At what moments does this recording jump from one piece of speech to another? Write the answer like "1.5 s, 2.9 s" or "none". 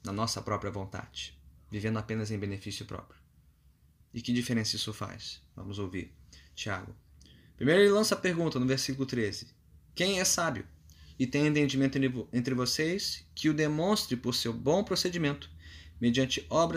4.0 s